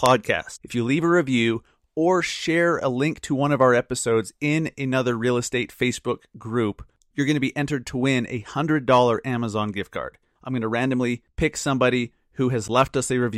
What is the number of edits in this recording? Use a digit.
2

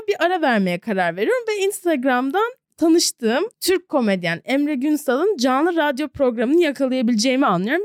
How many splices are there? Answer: 1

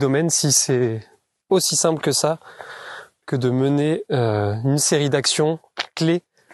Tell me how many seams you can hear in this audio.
0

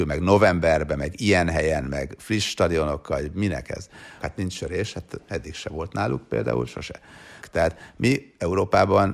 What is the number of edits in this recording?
2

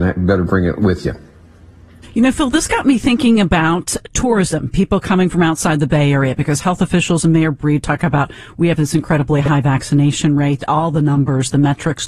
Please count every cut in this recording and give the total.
0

